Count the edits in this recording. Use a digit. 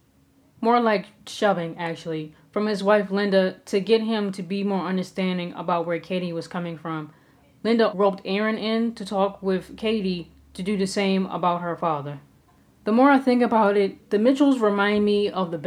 1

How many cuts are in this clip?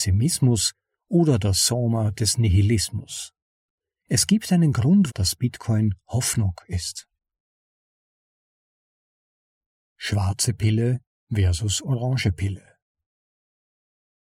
1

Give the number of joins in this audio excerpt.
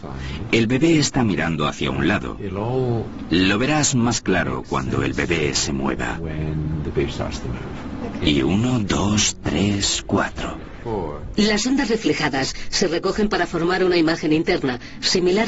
1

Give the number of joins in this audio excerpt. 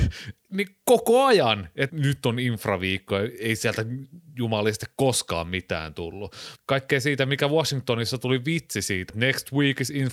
3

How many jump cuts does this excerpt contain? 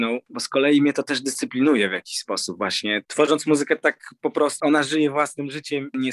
2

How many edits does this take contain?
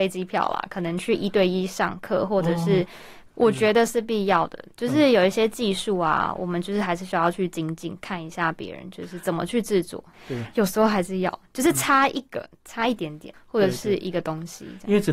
3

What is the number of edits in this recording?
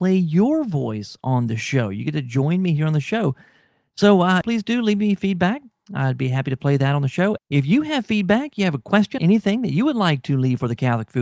3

